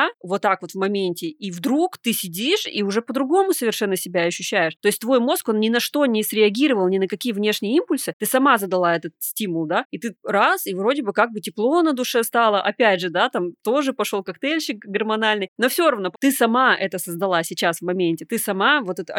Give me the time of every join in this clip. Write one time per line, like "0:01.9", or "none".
0:16.1